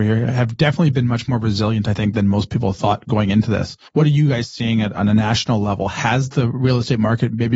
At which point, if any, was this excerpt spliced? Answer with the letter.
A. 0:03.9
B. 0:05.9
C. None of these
A